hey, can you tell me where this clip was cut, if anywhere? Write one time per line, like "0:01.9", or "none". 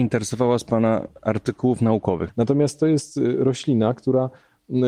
0:02.3

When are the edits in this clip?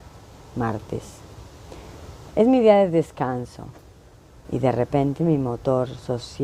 0:02.3
0:04.4

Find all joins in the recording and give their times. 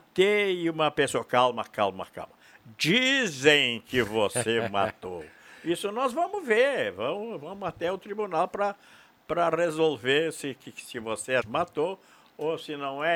0:11.4

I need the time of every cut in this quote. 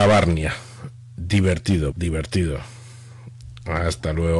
0:01.9

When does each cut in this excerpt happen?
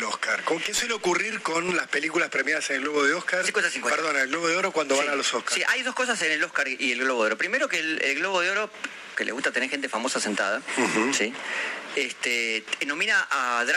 0:09.1
0:11.9

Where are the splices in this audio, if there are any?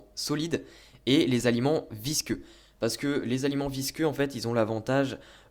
none

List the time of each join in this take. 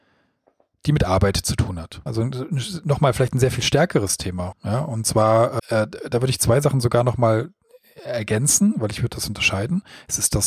0:02.1
0:04.5
0:05.6

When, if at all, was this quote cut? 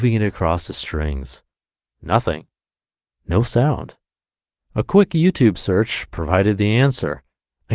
0:03.1

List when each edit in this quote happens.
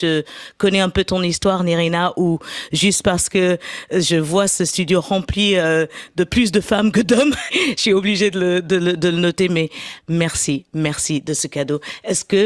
0:07.5
0:10.0

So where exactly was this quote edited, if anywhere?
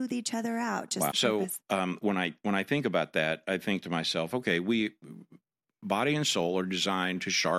0:01.1

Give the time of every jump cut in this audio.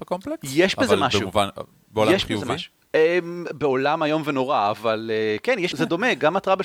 0:05.7

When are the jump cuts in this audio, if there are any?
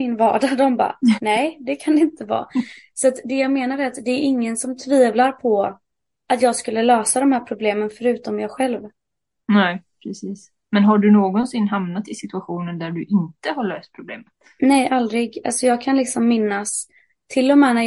none

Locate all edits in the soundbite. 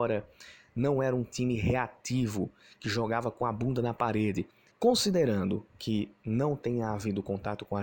0:04.7

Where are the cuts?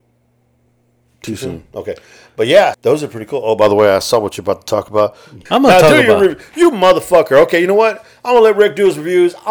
0:02.7
0:05.5

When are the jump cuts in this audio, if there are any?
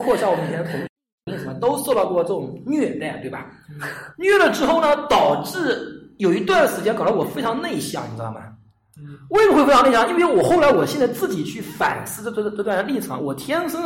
none

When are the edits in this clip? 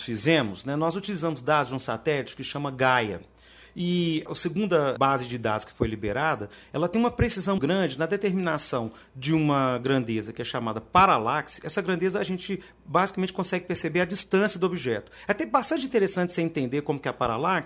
0:07.6

